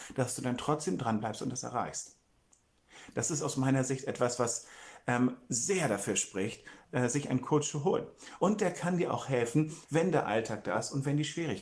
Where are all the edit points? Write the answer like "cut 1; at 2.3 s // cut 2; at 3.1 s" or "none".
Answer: cut 1; at 8.4 s // cut 2; at 9.8 s